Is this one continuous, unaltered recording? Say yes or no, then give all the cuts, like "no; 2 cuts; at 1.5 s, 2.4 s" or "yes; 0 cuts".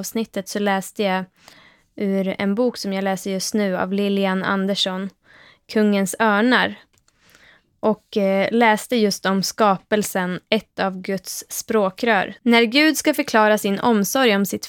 no; 1 cut; at 12.4 s